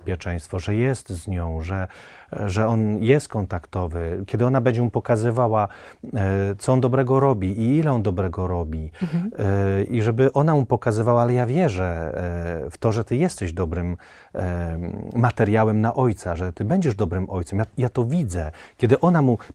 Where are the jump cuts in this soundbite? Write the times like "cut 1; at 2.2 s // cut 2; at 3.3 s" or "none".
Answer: none